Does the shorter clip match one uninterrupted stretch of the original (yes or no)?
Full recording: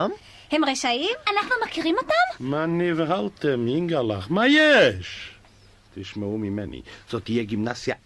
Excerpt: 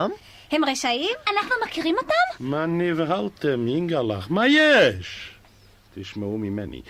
yes